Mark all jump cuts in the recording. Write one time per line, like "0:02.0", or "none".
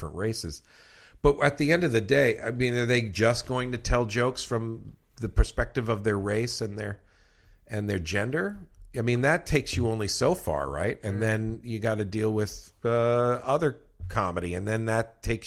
0:12.8